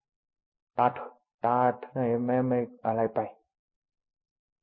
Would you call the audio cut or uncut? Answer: cut